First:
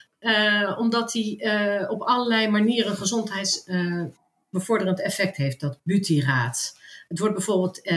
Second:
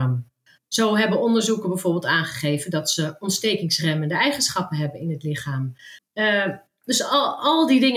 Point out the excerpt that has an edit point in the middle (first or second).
second